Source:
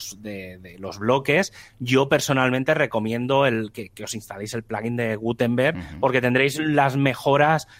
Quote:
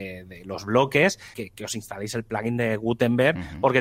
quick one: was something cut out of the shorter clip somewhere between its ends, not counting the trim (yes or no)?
yes